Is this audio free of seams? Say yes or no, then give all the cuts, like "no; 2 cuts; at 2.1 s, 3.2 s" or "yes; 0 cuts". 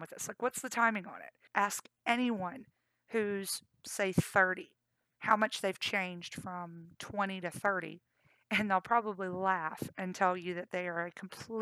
no; 1 cut; at 1.5 s